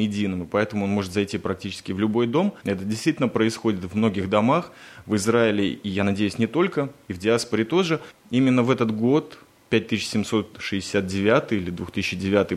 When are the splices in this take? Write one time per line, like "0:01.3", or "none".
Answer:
0:02.6
0:08.2